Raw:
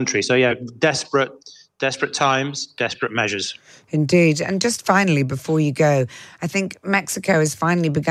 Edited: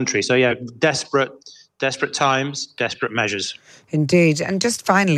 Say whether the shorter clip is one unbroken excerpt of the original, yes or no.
yes